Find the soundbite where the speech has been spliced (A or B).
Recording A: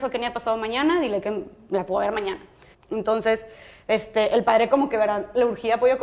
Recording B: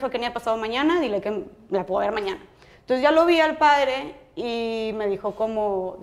A